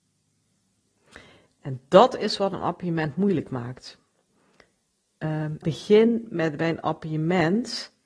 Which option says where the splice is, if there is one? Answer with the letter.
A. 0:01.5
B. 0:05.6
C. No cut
B